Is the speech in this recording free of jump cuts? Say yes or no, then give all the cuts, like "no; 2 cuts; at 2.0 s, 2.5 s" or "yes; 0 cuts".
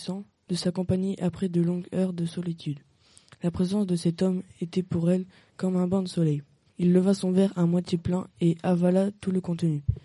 no; 1 cut; at 6.7 s